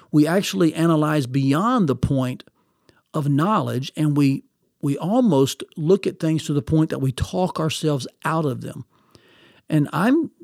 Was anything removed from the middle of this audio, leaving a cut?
no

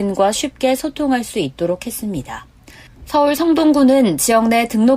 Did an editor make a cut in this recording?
yes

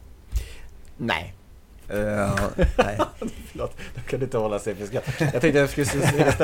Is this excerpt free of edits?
yes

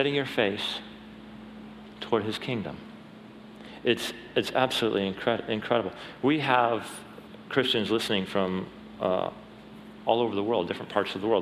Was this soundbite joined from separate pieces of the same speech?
no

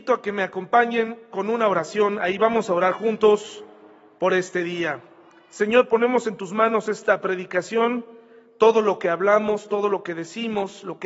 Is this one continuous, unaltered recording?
yes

